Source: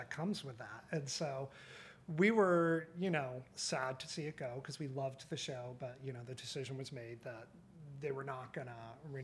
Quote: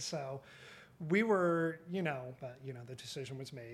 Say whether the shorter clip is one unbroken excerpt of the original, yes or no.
no